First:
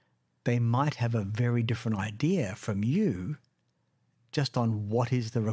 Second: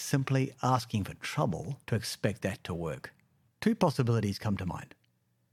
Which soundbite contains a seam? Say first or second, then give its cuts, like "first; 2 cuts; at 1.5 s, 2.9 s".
second; 2 cuts; at 1.8 s, 3.5 s